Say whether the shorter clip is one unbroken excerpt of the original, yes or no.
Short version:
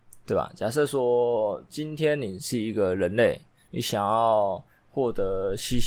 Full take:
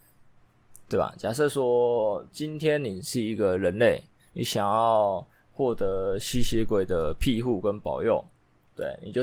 yes